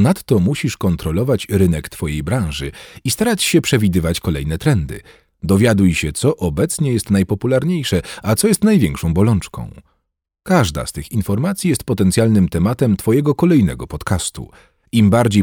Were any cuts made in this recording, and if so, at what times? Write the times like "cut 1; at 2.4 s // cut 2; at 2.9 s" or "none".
none